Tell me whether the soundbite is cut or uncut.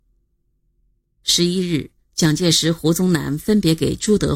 uncut